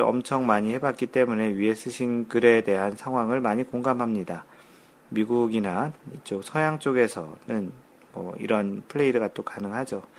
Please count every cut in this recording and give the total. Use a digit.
0